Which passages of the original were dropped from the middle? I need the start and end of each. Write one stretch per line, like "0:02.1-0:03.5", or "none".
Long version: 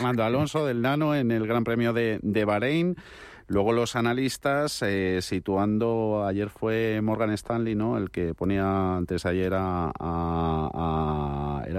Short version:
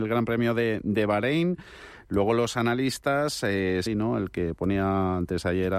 0:05.2-0:07.7